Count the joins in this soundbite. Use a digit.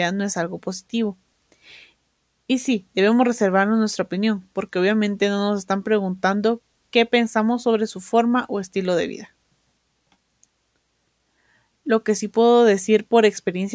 0